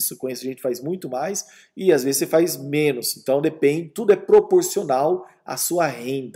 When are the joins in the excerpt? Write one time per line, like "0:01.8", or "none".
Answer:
none